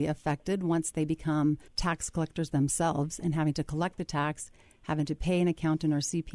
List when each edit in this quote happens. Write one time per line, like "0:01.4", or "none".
0:01.7

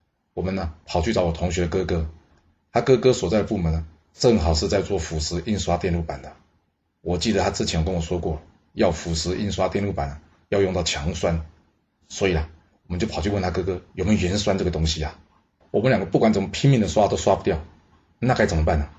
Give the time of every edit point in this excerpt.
0:15.6

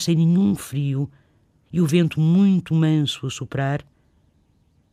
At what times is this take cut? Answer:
none

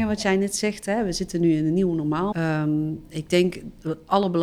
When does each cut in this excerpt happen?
0:02.3

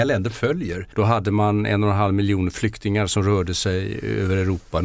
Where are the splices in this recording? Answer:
0:00.9

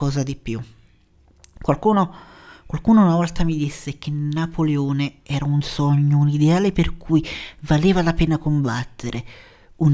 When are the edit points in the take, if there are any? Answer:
none

